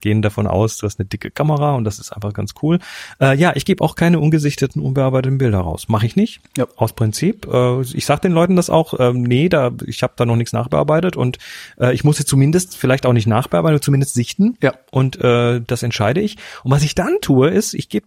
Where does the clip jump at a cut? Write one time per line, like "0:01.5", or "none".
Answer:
none